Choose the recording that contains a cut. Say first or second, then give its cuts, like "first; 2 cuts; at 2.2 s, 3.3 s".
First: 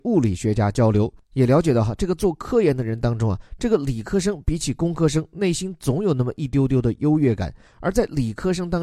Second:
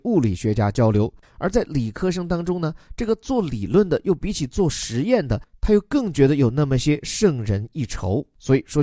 second; 1 cut; at 1.2 s